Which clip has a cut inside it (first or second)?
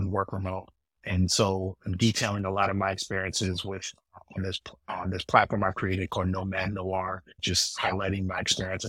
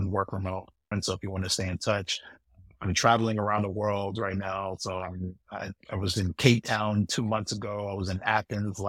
second